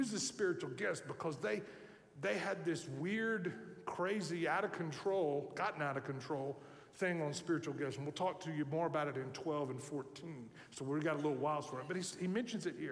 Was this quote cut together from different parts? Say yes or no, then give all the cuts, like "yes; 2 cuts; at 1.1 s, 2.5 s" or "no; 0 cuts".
no; 0 cuts